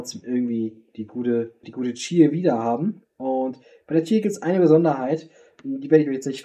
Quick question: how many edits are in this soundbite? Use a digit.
1